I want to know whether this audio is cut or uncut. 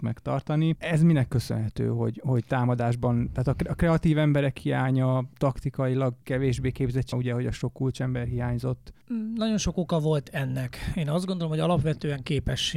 cut